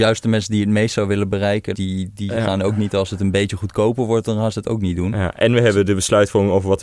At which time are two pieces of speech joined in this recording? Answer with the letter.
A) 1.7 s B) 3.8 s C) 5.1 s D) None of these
A